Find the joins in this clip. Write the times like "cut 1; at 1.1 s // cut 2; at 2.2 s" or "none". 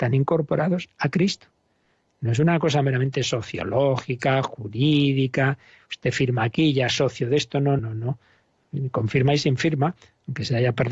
cut 1; at 7.8 s